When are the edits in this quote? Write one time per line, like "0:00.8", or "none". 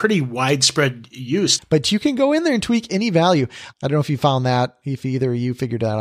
0:01.6
0:03.7